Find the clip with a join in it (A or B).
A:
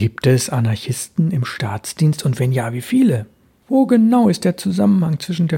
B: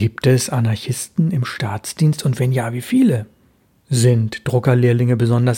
A